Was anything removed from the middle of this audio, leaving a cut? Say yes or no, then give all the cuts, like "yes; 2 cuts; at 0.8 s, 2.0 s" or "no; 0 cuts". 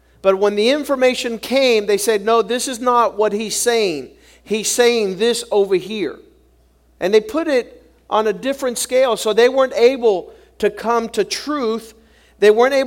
no; 0 cuts